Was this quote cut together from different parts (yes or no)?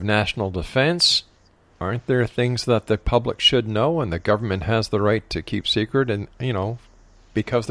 no